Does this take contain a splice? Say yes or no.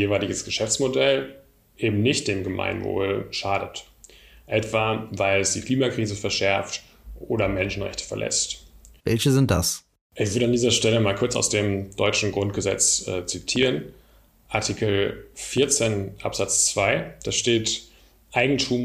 yes